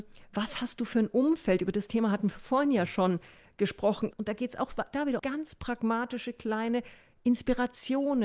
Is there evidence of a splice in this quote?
yes; 2 cuts; at 4.1 s, 5.2 s

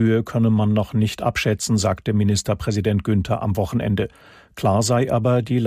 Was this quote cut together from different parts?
no; 0 cuts

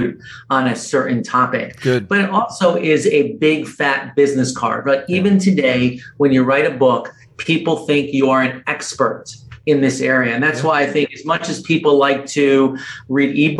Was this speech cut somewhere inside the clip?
no; 0 cuts

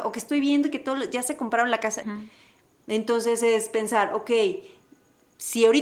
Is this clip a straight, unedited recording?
no; 1 cut; at 2.0 s

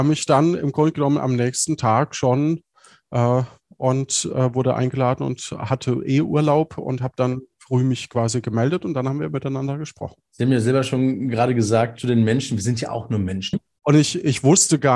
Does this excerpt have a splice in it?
yes; 2 cuts; at 10.2 s, 13.5 s

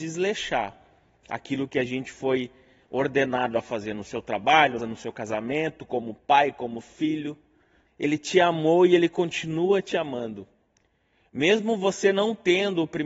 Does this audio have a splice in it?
yes; 2 cuts; at 4.8 s, 7.9 s

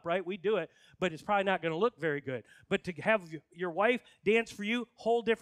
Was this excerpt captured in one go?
yes; 0 cuts

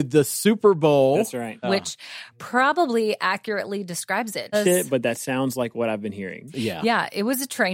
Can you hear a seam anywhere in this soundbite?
yes; 2 cuts; at 1.6 s, 4.5 s

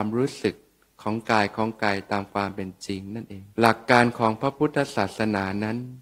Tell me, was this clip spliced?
yes; 1 cut; at 3.5 s

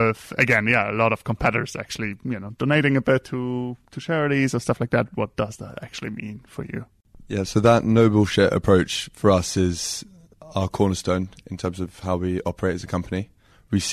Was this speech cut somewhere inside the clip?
yes; 1 cut; at 5.1 s

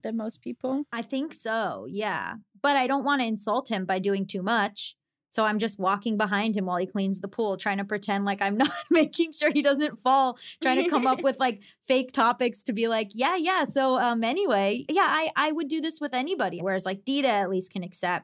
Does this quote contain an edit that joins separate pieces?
yes; 2 cuts; at 14.9 s, 16.6 s

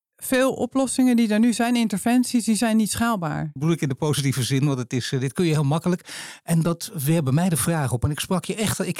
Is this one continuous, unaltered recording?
no; 1 cut; at 3.6 s

